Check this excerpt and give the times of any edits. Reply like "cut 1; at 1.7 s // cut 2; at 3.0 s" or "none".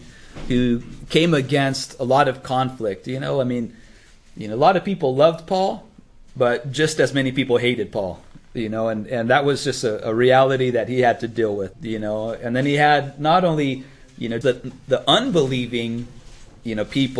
cut 1; at 11.7 s // cut 2; at 14.4 s